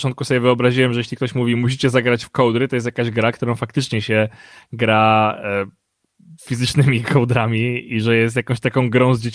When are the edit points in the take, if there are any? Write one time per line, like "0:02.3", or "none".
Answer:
none